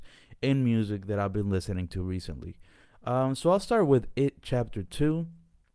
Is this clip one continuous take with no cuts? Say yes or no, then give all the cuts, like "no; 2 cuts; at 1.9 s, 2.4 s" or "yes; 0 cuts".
yes; 0 cuts